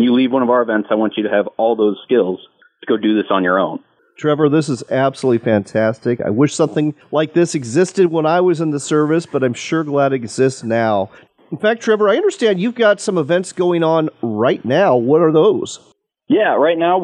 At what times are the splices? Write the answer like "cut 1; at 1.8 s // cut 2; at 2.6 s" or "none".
none

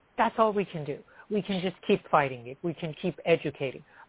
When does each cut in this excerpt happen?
cut 1; at 2.9 s

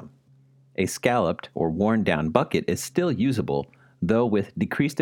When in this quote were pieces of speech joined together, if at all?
none

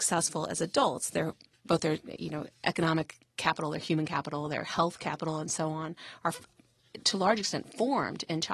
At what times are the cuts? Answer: none

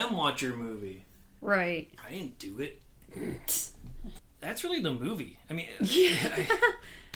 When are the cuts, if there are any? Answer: cut 1; at 2.0 s

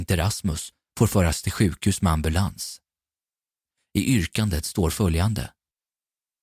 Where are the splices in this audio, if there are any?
none

